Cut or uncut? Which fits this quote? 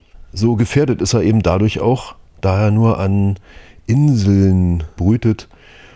cut